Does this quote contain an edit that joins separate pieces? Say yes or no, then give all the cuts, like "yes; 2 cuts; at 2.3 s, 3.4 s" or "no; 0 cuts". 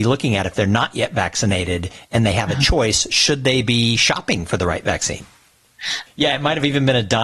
yes; 1 cut; at 6.1 s